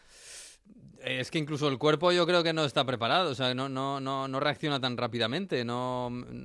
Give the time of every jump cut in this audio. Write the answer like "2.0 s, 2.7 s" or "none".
none